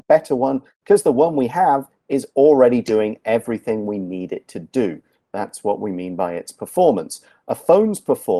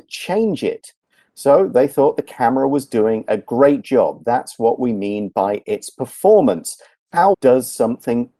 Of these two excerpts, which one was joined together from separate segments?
second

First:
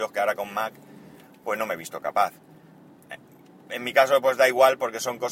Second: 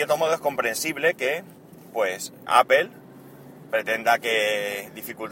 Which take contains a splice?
second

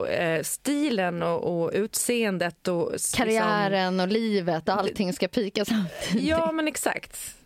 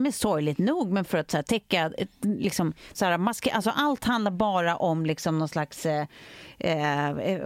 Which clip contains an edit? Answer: second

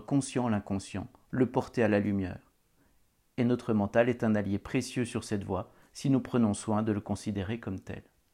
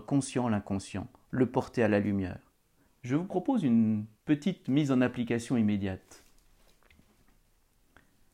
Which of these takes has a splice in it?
second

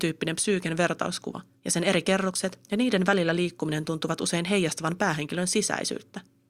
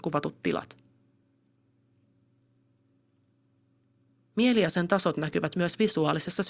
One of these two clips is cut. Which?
first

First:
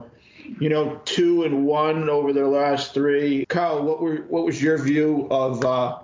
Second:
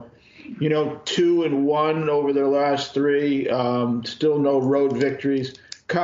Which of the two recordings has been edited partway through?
first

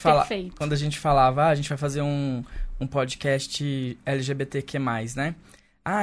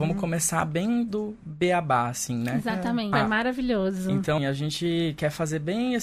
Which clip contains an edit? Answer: second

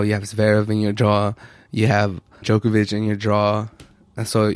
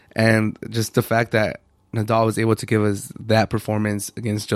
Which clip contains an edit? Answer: first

